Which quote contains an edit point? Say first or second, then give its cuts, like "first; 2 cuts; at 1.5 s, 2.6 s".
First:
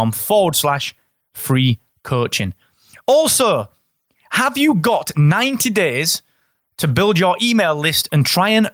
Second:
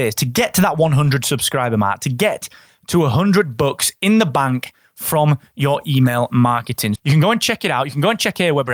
second; 1 cut; at 6.9 s